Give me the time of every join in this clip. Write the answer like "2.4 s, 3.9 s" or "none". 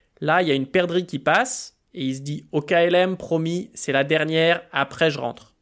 none

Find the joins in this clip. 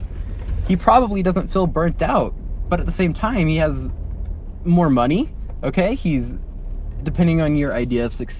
none

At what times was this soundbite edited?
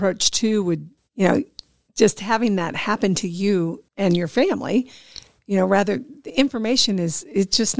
1.0 s, 3.9 s

